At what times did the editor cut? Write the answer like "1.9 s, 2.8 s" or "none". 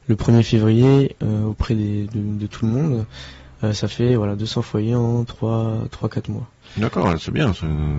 none